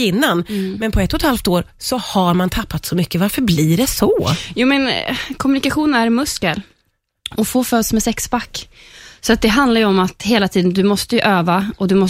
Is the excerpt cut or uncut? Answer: uncut